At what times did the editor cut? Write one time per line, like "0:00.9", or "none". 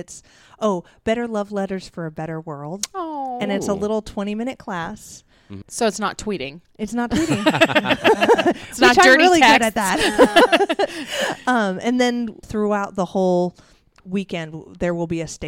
0:05.6
0:12.4